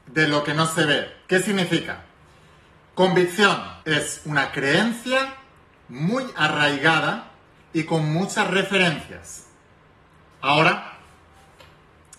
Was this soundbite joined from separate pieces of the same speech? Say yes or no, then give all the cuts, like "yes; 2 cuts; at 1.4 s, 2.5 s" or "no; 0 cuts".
yes; 3 cuts; at 1.3 s, 3.8 s, 10.3 s